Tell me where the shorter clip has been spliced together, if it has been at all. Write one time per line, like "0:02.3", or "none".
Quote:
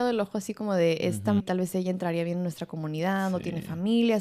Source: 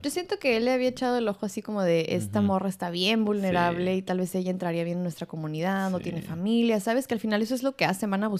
0:01.4